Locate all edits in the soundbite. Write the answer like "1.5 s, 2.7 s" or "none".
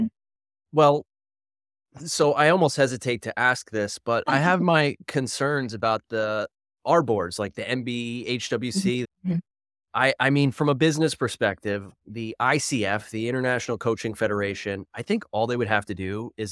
9.0 s